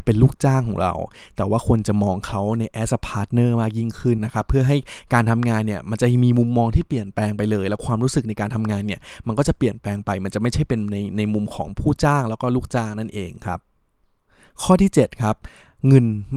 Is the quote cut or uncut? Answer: cut